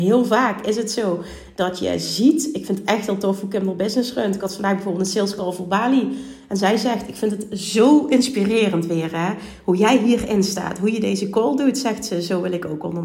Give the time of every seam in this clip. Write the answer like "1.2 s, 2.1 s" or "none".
none